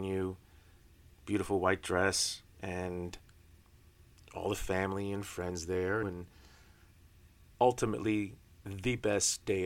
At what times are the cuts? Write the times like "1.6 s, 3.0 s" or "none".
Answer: 2.5 s, 6.0 s, 7.5 s